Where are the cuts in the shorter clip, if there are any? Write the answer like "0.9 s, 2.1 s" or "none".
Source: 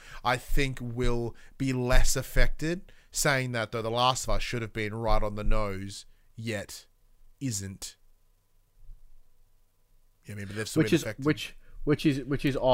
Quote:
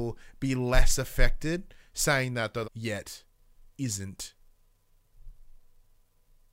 2.6 s